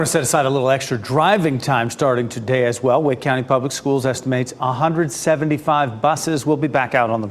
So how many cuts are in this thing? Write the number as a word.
zero